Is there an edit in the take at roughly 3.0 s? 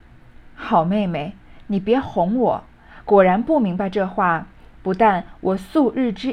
no; 0 cuts

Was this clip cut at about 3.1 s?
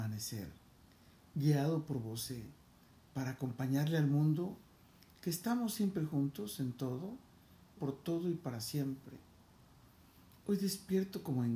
no; 1 cut; at 7.8 s

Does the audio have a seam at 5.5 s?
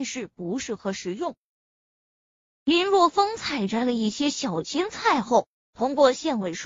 yes; 1 cut; at 5.5 s

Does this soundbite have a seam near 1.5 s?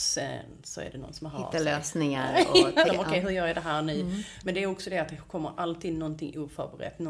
no; 2 cuts; at 2.9 s, 4.4 s

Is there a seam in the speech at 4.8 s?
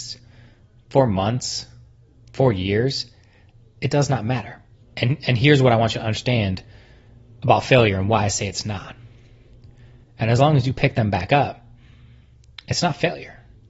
yes; 2 cuts; at 4.8 s, 10.0 s

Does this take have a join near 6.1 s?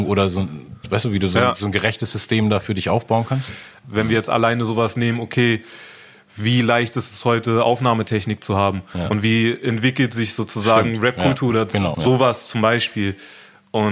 no; 2 cuts; at 3.8 s, 11.9 s

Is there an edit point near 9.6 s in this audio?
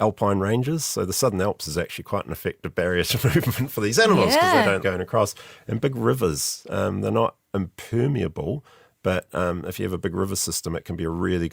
no; 1 cut; at 4.8 s

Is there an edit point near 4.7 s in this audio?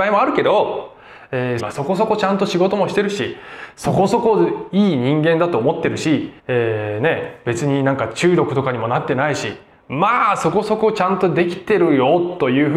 no; 2 cuts; at 1.6 s, 6.4 s

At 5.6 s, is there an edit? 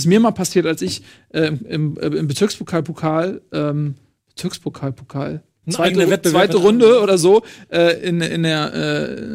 yes; 1 cut; at 5.6 s

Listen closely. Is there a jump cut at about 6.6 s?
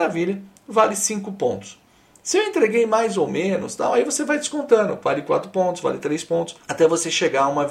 yes; 1 cut; at 6.6 s

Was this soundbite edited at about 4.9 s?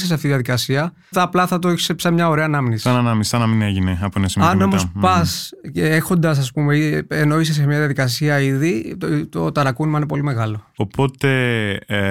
no; 1 cut; at 1.1 s

